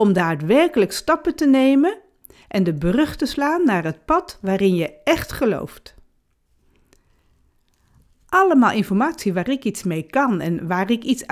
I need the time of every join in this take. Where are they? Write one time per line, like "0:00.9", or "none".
none